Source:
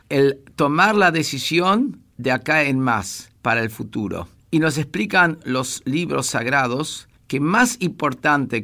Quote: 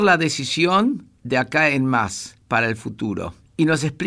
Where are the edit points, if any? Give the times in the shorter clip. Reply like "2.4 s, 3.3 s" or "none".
none

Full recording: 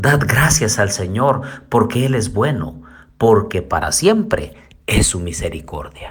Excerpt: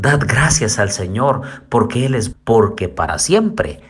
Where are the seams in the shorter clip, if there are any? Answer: 2.3 s

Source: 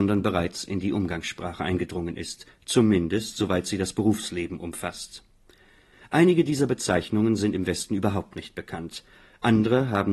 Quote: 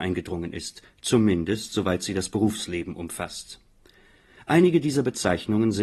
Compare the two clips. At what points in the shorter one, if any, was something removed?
none

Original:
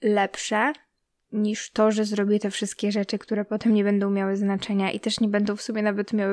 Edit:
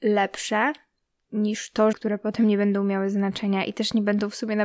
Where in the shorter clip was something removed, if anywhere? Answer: 1.9 s

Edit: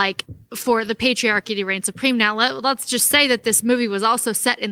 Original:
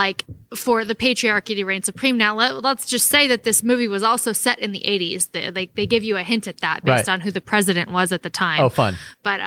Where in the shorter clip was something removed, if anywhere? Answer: none

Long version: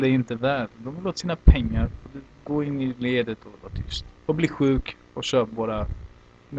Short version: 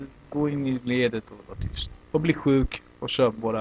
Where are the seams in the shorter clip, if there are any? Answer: none

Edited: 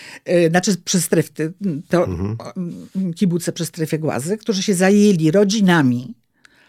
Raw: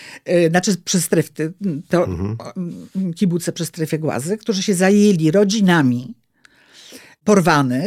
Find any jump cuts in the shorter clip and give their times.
none

